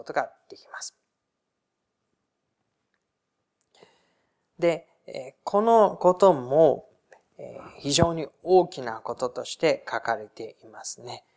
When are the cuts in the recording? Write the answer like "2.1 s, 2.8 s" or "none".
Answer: none

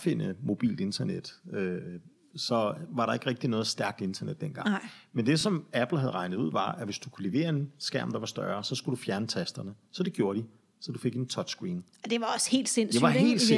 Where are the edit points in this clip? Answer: none

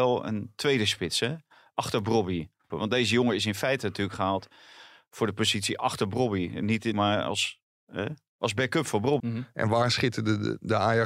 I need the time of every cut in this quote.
2.7 s, 6.9 s, 9.2 s

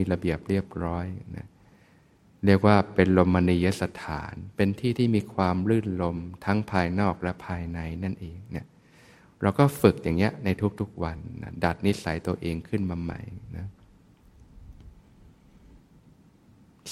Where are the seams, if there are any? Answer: none

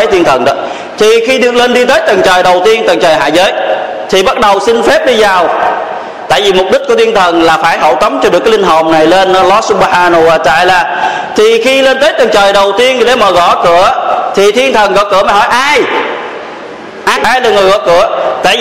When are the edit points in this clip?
17.2 s

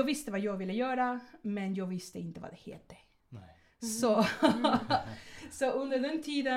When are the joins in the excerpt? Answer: none

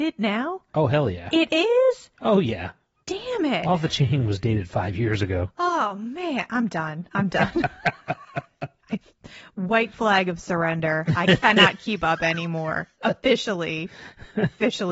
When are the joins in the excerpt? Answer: none

